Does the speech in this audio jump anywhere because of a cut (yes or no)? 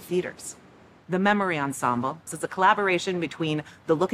yes